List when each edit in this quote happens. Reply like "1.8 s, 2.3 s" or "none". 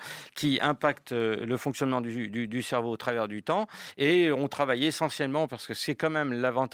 none